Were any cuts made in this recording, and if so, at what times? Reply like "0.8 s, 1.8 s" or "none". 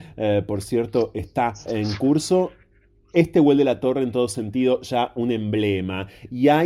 1.7 s